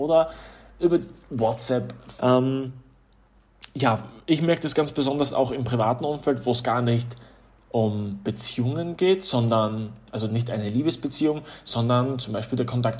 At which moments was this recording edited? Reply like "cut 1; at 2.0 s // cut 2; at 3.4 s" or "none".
cut 1; at 2.2 s